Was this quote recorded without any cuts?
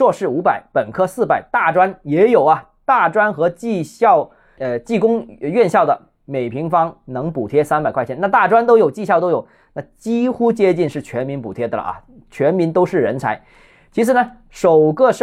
yes; 0 cuts

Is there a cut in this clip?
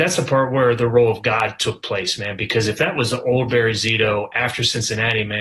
no; 0 cuts

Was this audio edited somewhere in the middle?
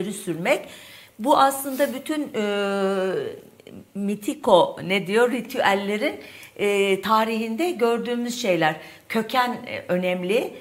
no; 0 cuts

